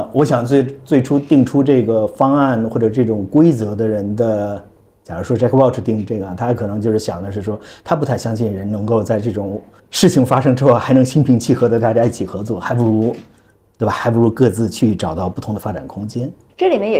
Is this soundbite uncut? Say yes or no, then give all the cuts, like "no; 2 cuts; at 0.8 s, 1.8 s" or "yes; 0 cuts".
yes; 0 cuts